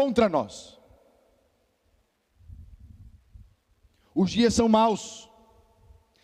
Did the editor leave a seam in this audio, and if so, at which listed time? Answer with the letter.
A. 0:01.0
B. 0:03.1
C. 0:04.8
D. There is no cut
D